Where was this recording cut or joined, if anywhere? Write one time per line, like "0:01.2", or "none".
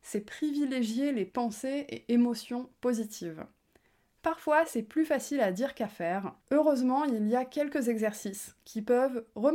0:06.4

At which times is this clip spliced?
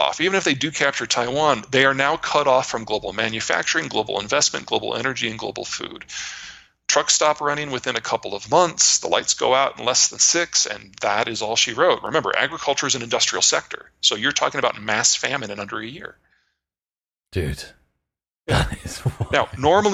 none

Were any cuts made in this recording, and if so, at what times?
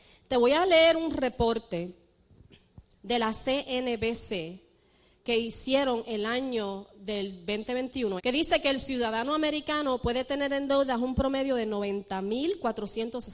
0:08.2

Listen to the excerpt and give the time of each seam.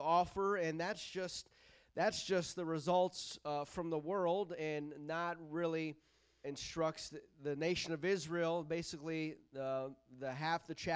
0:06.4

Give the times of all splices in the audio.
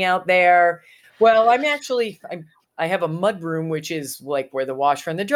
0:01.0

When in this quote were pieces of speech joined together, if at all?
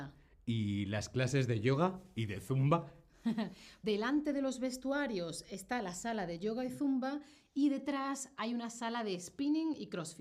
0:03.8

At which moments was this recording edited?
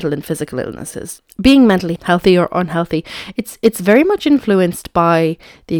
0:02.0

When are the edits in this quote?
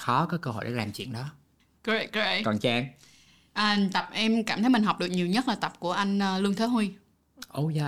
none

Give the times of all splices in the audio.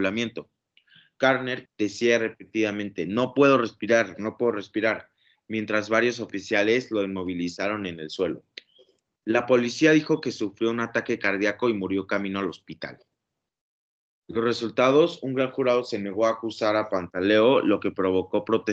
0:01.6

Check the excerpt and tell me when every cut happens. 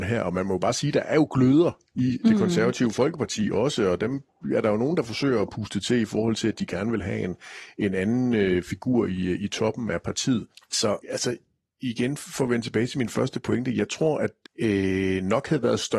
0:14.5

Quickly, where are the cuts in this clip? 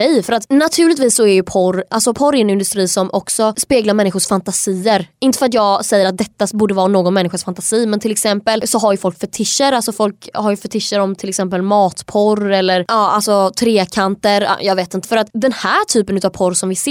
0:15.0

